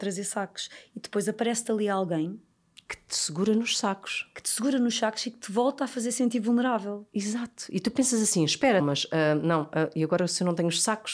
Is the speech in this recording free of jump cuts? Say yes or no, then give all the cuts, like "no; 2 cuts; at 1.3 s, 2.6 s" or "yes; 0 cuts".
no; 1 cut; at 8.8 s